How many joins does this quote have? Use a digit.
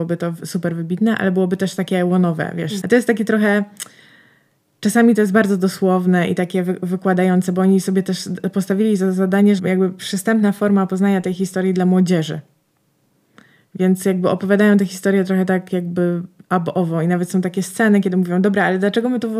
2